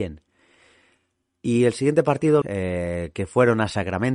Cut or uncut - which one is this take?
cut